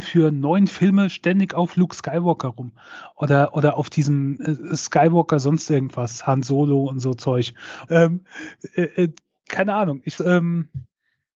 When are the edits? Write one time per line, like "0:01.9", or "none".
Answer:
0:07.9
0:10.2